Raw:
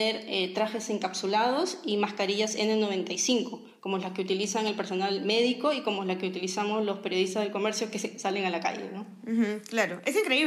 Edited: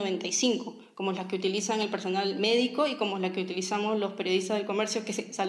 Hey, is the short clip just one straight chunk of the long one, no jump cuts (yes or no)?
yes